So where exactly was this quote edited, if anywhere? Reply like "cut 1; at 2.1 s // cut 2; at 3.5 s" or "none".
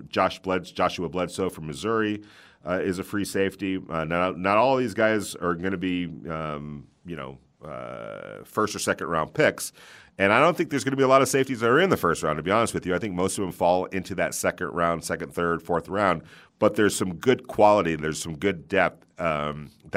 none